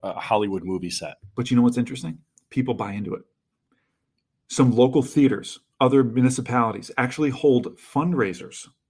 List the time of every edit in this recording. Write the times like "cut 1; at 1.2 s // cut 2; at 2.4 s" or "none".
none